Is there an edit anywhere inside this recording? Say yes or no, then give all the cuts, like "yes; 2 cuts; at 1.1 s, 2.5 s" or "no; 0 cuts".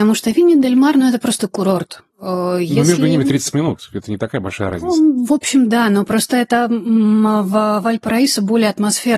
no; 0 cuts